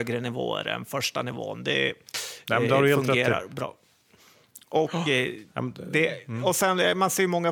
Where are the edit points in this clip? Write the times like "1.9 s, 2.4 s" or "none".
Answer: none